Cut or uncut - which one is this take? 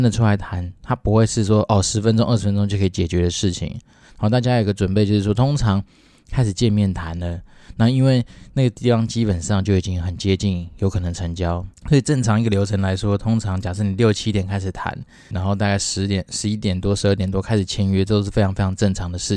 cut